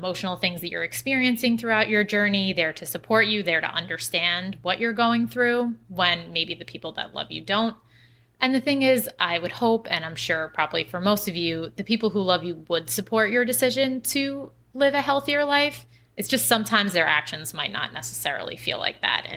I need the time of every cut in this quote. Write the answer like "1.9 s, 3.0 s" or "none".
none